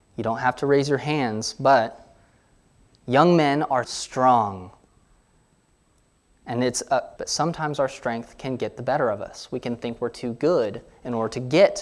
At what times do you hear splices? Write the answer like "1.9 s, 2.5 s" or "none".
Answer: 3.8 s, 7.2 s